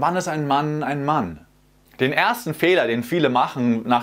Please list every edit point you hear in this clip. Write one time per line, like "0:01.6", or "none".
none